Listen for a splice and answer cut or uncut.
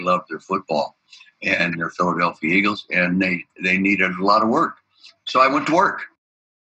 uncut